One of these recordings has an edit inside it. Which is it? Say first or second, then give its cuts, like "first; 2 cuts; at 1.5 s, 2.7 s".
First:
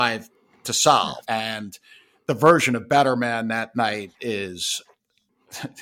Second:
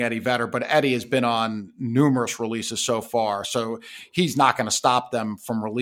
first; 1 cut; at 1.2 s